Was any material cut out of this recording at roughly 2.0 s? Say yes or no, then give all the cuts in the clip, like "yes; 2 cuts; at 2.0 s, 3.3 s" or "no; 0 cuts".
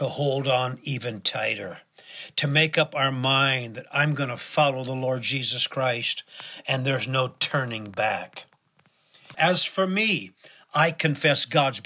no; 1 cut; at 9.3 s